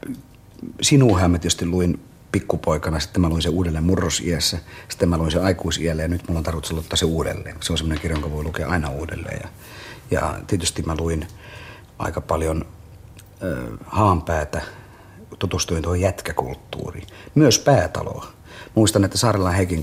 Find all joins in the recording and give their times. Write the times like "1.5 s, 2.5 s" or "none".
none